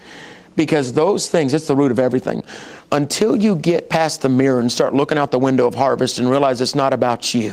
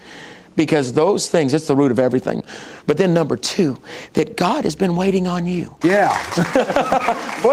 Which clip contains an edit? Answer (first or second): second